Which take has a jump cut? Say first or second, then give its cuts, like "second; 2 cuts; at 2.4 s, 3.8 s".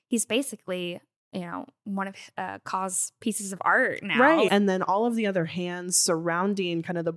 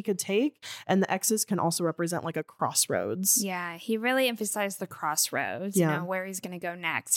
first; 1 cut; at 4.5 s